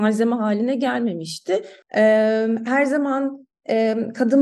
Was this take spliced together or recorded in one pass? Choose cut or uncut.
cut